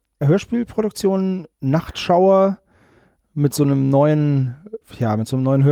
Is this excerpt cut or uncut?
cut